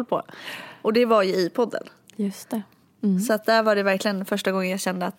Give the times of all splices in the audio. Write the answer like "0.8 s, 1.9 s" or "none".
none